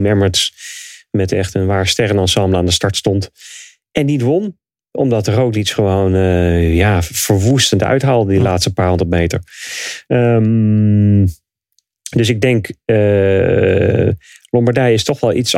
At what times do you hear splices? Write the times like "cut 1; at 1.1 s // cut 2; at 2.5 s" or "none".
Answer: cut 1; at 10.0 s